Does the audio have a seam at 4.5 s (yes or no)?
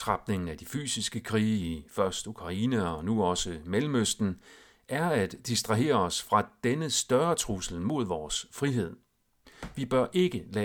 no